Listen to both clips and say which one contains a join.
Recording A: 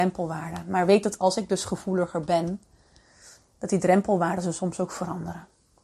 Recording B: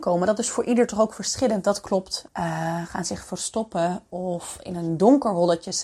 B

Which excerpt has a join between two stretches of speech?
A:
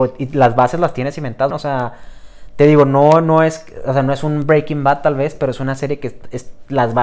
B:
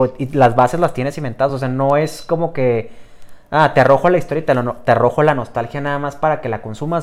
A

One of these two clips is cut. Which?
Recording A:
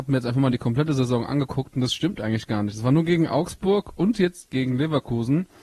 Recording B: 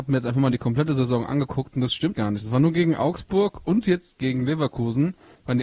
B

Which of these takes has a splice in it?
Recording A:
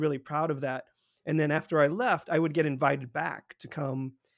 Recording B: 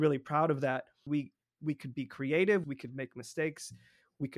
B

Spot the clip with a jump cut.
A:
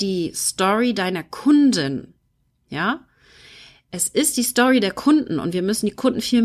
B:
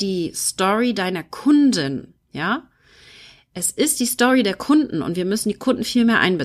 B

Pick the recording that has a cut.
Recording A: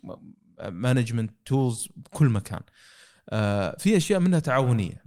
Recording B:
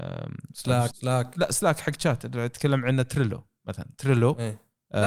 B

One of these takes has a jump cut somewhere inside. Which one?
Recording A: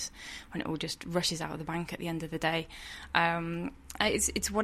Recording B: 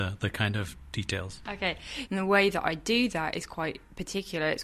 B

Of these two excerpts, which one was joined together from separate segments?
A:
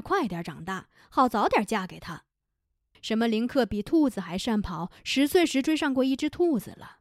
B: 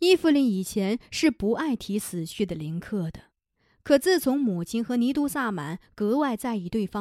A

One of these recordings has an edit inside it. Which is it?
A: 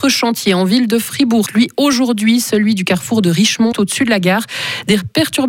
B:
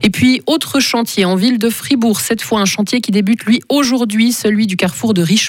A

